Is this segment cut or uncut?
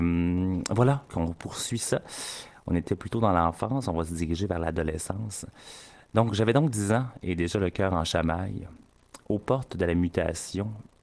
cut